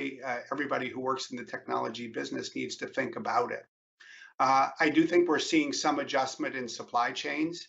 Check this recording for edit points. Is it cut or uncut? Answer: uncut